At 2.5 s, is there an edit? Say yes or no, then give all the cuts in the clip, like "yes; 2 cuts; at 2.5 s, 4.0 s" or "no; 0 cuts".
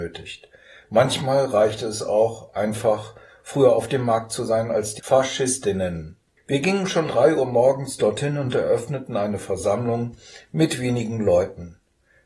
no; 1 cut; at 7.1 s